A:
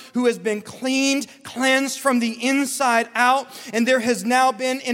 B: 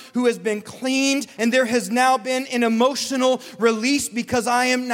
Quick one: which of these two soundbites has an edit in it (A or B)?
B